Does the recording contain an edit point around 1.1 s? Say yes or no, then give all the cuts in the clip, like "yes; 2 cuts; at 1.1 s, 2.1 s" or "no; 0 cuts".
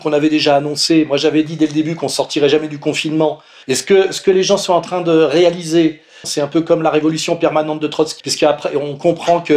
no; 3 cuts; at 3.6 s, 6.2 s, 8.2 s